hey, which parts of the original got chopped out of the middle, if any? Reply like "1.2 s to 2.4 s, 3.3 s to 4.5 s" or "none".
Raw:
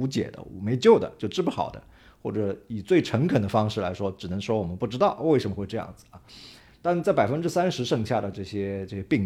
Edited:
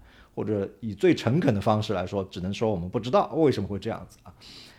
none